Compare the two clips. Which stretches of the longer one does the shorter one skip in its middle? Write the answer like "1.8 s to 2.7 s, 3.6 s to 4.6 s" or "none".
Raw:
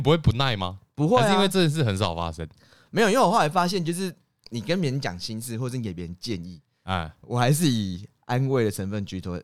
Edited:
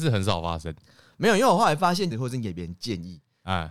3.8 s to 5.5 s